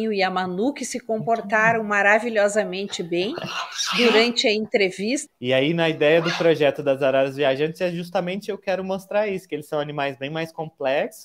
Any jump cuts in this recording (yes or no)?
yes